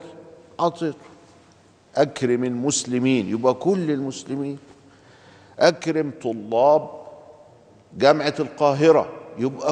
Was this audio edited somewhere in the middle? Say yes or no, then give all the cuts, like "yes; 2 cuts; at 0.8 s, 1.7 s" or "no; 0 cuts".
no; 0 cuts